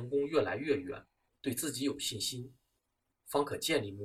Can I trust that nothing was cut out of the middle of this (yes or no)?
no